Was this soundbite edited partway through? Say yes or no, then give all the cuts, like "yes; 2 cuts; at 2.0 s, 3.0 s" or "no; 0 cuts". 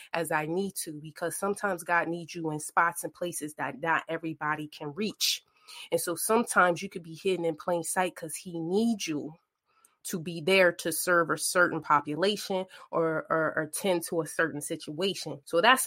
no; 0 cuts